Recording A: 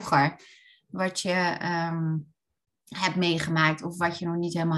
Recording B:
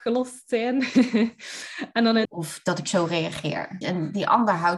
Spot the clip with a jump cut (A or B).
B